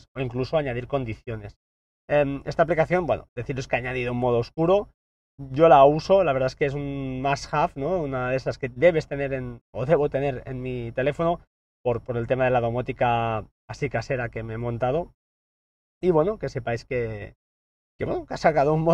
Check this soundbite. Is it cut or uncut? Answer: uncut